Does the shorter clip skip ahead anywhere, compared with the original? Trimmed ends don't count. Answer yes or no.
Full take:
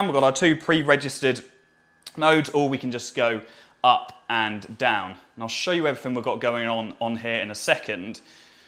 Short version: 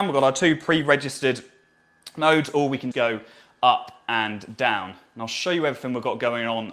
yes